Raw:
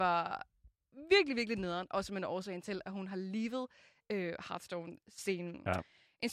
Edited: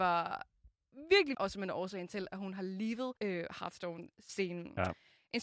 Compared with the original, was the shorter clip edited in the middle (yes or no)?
yes